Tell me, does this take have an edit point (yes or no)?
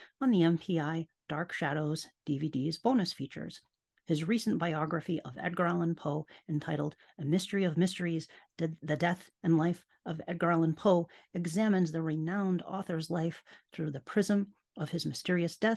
no